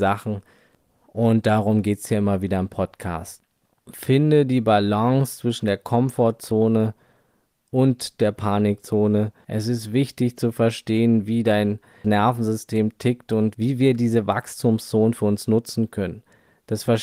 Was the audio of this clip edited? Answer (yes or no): no